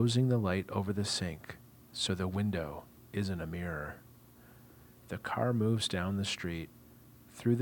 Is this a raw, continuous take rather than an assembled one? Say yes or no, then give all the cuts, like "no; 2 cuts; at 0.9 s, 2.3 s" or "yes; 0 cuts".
yes; 0 cuts